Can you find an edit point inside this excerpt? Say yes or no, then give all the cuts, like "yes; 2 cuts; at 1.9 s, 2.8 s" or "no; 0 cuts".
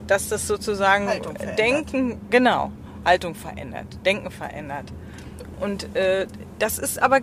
no; 0 cuts